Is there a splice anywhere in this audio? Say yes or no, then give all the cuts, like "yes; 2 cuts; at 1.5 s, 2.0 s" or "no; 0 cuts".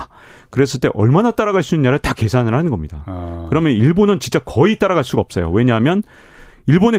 no; 0 cuts